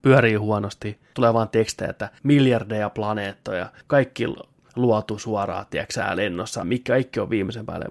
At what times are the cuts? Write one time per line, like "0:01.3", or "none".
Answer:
0:01.1
0:06.6